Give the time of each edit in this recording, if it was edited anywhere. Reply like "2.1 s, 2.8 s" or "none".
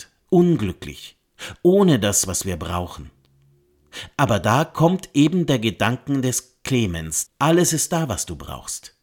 7.3 s